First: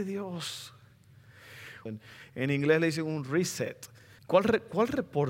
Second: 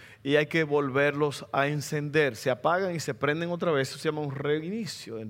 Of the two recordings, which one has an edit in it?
first; 2 cuts; at 1.9 s, 4.2 s

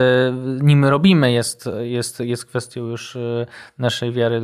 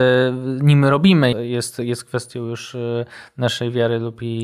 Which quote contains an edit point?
second; 1 cut; at 1.3 s

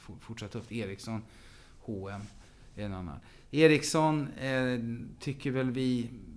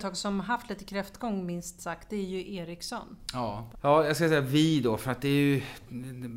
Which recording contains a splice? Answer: second; 1 cut; at 3.7 s

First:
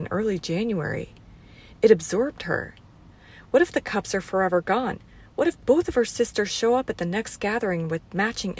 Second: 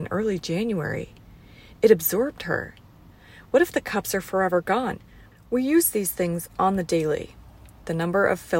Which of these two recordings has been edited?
second; 1 cut; at 5.3 s

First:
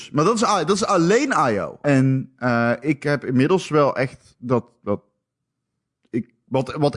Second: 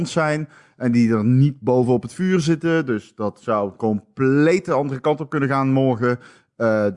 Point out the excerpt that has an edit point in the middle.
first; 1 cut; at 1.8 s

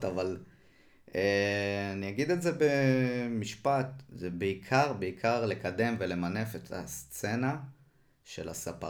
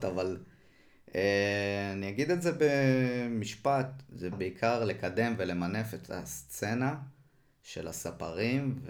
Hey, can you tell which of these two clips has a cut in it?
second; 1 cut; at 4.3 s

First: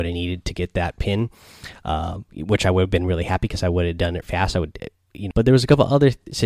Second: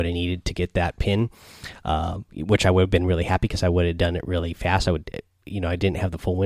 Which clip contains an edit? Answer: first; 2 cuts; at 4.2 s, 5.3 s

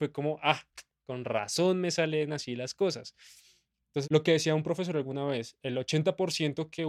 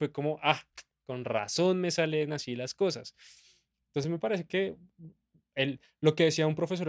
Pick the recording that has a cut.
first; 2 cuts; at 4.0 s, 5.6 s

